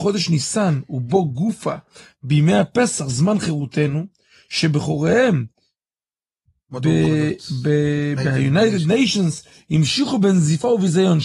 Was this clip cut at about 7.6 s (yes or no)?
no